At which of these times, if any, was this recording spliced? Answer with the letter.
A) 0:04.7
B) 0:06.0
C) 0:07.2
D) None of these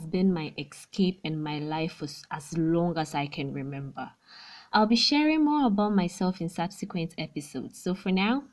A